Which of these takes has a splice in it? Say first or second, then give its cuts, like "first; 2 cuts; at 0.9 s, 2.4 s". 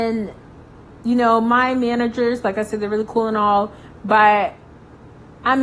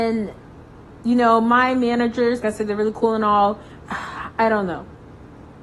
second; 2 cuts; at 2.4 s, 3.8 s